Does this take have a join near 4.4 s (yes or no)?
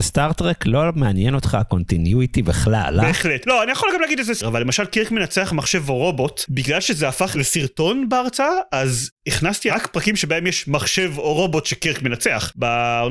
yes